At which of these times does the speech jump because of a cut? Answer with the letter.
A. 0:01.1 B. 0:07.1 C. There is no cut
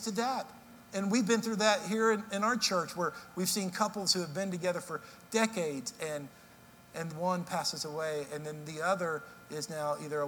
B